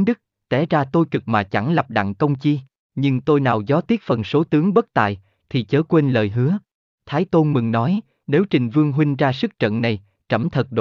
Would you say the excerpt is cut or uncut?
cut